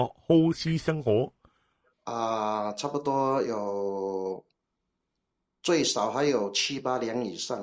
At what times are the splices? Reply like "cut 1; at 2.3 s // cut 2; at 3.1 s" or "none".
cut 1; at 1.9 s